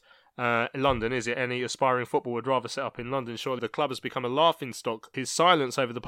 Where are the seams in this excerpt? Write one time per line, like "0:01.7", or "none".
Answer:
0:03.6
0:05.1